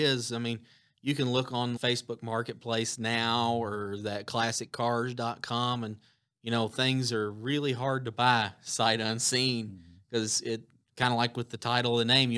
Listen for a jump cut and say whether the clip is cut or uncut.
cut